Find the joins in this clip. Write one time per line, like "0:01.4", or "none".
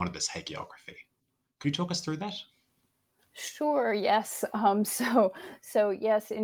none